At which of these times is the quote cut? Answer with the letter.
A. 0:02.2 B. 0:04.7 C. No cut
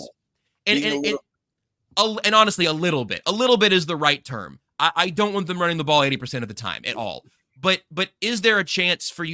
A